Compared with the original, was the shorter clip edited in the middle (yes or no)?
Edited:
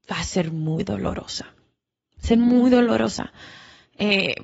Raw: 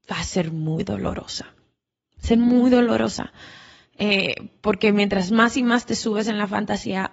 no